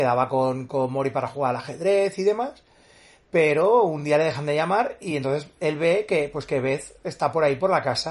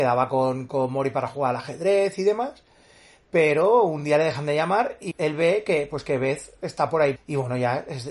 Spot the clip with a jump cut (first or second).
second